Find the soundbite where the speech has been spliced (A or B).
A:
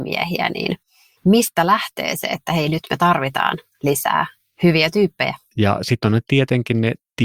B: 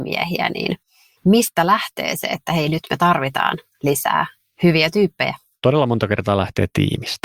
A